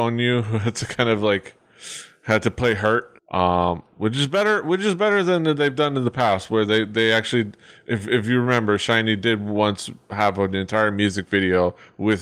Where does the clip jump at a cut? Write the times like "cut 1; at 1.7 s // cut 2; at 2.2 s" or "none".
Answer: cut 1; at 3.2 s